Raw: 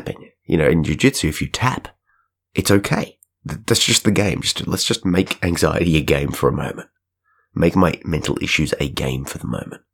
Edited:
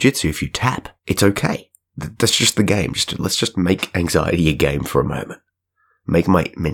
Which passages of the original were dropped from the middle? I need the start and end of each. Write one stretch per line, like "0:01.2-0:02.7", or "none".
0:02.0-0:02.4